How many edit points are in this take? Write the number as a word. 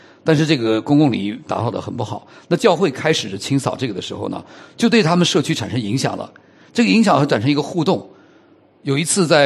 zero